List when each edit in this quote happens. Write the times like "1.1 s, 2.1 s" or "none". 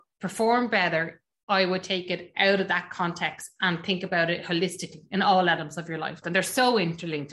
6.2 s